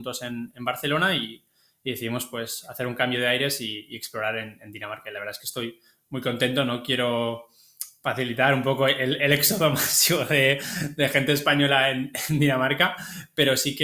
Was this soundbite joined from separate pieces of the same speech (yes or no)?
no